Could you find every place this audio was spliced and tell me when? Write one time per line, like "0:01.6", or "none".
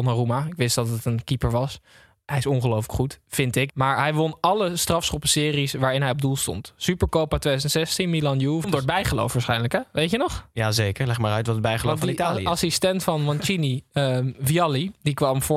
0:03.7
0:08.6